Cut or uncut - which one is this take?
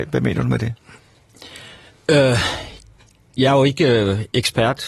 uncut